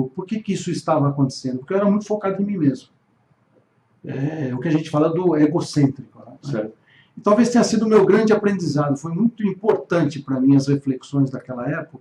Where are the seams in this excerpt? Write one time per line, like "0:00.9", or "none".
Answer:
0:06.3